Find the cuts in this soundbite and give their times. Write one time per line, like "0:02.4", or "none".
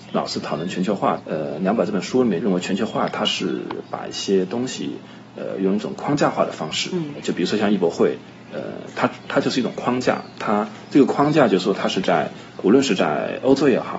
0:01.2